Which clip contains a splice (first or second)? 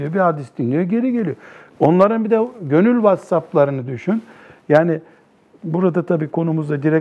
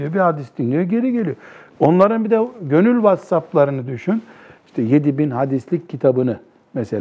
second